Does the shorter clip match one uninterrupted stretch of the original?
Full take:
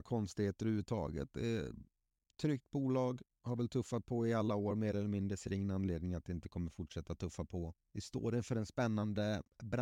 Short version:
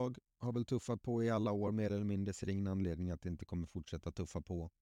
yes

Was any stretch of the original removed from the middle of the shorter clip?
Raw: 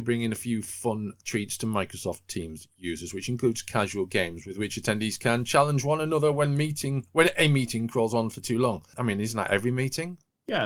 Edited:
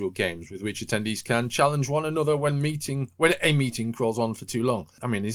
no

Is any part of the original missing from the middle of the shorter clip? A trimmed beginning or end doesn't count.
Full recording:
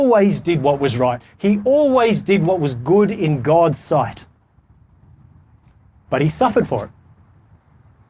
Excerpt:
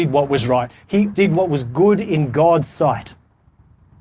yes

